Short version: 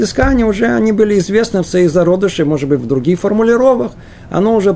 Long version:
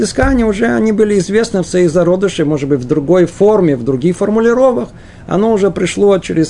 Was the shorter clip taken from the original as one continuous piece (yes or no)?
no